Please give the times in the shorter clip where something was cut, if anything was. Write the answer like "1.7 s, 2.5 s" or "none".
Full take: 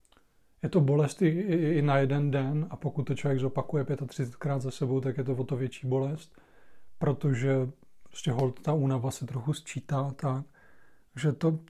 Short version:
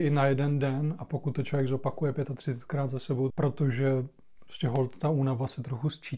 3.3 s